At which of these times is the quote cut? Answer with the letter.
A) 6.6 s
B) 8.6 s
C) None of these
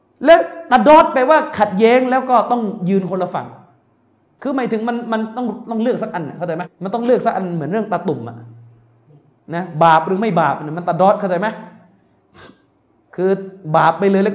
A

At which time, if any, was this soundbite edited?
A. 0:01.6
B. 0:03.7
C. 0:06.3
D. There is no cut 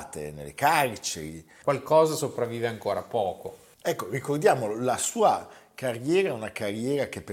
A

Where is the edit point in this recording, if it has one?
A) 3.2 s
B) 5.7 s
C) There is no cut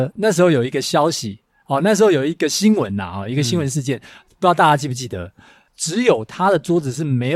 B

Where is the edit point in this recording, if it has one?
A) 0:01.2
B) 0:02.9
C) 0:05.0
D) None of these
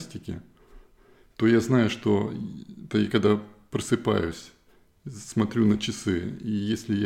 B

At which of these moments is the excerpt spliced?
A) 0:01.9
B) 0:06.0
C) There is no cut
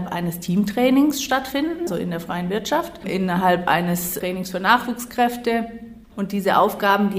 A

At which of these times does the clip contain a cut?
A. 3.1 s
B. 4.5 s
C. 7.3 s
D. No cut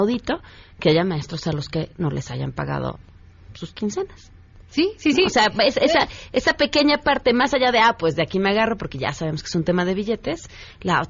D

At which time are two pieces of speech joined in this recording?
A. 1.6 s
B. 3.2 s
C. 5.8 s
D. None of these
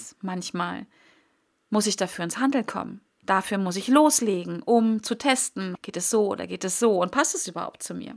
C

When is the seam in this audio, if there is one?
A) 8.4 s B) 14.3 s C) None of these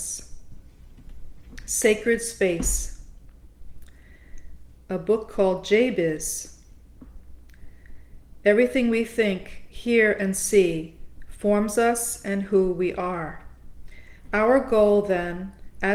A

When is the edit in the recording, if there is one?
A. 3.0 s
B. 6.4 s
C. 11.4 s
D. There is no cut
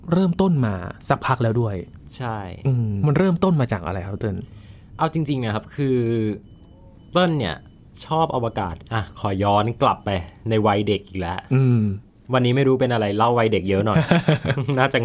A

